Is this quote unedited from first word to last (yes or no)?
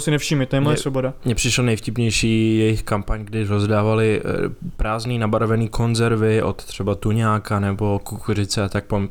yes